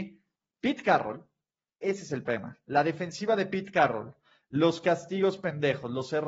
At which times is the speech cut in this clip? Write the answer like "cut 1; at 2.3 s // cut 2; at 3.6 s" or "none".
none